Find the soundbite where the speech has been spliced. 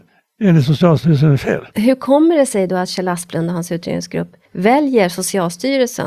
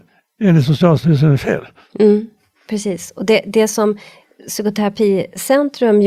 first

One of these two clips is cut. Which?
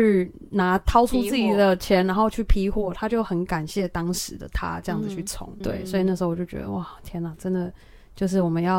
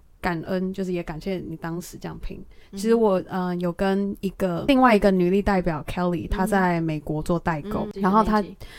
first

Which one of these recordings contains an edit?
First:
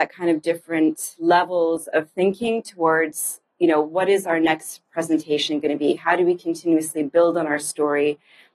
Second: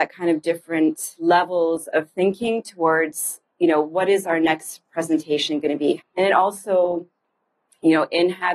second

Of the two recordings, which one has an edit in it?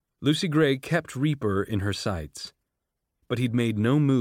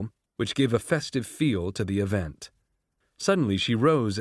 second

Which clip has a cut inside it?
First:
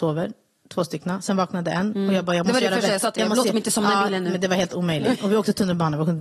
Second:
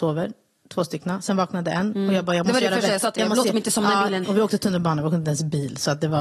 second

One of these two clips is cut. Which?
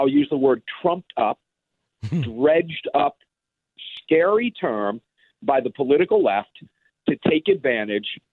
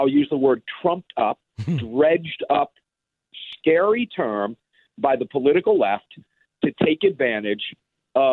second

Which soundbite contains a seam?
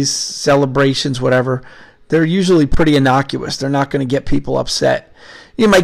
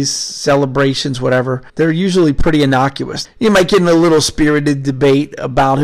second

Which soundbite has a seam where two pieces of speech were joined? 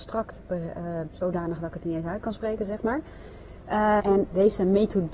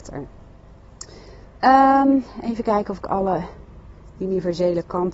first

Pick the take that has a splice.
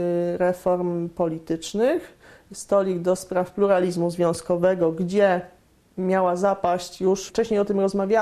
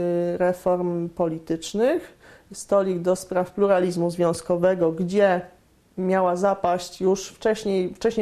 first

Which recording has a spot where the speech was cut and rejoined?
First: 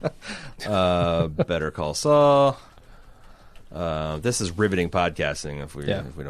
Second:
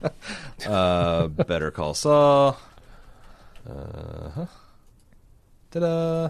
second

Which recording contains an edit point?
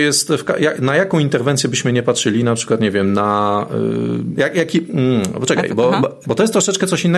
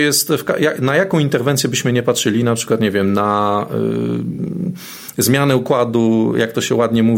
first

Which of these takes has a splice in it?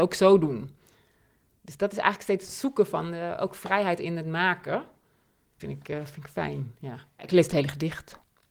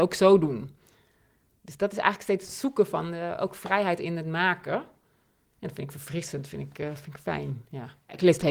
first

